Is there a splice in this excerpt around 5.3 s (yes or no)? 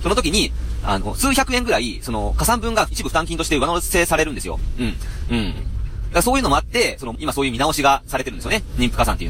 yes